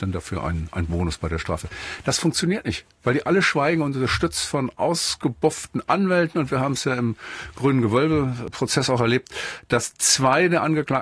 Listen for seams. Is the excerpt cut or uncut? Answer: uncut